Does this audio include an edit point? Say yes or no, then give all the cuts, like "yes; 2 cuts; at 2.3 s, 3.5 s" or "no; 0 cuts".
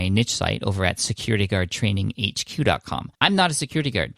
yes; 1 cut; at 3.1 s